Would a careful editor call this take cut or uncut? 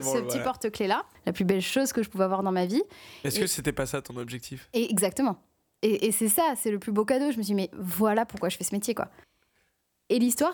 cut